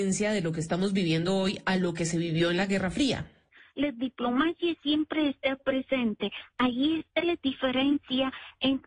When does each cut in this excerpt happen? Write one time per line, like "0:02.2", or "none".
none